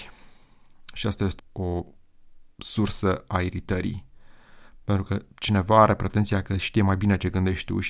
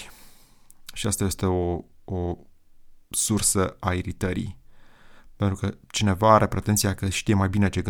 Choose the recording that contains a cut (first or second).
first